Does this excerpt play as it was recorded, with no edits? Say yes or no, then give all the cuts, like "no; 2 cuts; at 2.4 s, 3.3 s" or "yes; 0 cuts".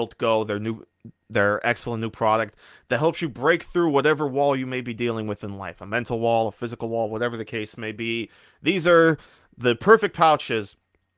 yes; 0 cuts